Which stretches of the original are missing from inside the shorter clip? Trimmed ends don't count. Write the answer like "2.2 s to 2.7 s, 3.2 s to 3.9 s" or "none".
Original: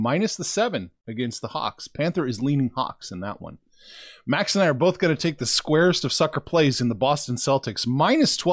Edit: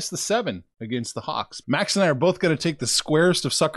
1.9 s to 4.2 s